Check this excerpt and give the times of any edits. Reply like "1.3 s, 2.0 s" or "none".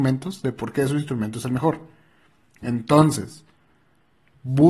none